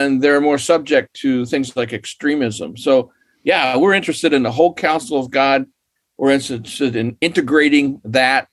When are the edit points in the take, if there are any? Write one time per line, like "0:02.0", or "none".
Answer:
none